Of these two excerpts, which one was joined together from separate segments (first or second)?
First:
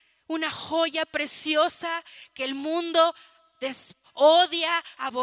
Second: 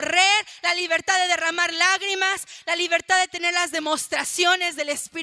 first